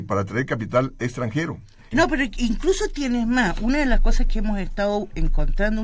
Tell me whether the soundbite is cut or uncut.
cut